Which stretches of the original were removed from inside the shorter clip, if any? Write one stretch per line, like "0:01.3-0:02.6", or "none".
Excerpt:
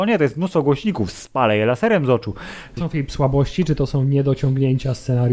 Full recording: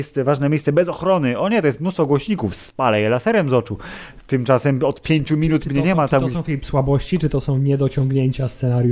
0:04.2-0:06.3